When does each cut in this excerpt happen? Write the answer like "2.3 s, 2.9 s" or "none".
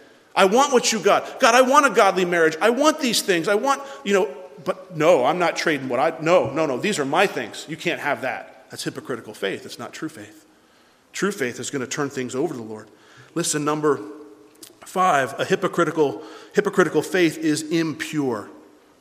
none